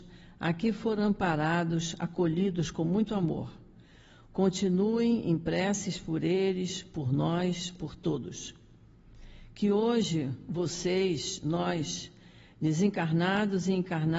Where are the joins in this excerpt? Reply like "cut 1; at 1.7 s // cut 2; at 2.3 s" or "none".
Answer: none